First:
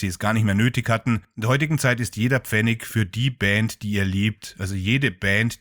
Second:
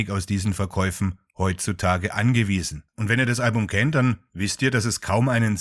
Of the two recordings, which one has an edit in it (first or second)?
second